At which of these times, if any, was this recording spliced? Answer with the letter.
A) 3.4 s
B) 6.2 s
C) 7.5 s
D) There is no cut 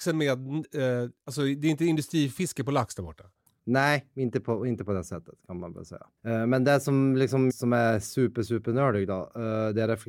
C